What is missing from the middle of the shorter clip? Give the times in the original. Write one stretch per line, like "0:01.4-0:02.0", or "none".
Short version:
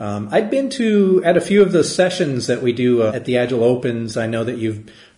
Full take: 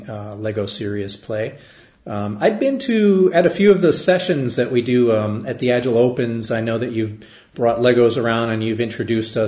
0:05.2-0:05.4